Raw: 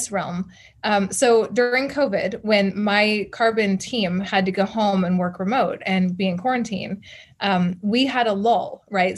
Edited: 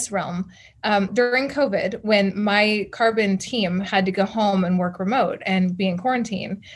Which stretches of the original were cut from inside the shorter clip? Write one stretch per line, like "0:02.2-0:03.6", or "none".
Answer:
0:01.1-0:01.5